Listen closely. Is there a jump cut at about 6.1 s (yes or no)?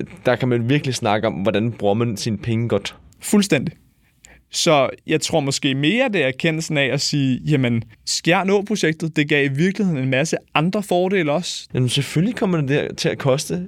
no